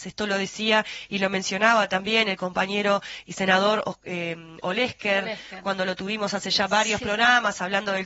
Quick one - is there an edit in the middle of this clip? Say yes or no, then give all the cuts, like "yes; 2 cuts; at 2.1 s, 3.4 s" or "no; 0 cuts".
no; 0 cuts